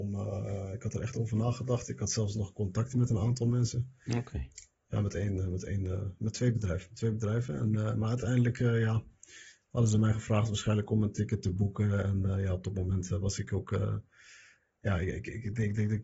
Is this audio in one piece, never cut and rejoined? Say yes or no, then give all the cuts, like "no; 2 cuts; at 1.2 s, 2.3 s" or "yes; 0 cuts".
yes; 0 cuts